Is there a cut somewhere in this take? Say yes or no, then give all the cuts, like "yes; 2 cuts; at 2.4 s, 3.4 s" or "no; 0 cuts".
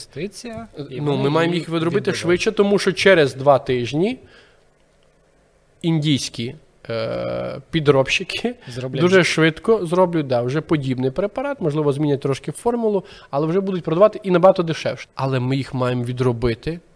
yes; 1 cut; at 15.0 s